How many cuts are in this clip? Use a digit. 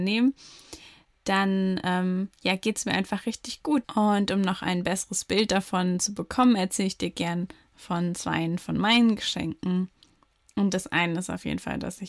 1